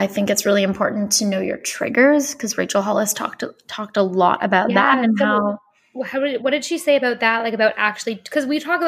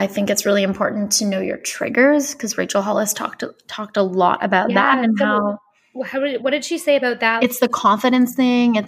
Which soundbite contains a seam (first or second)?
second